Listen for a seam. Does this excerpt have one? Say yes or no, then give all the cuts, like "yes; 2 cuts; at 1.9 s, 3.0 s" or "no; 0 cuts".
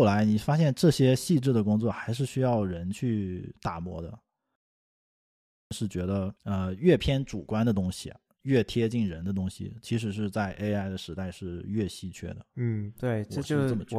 yes; 1 cut; at 6.4 s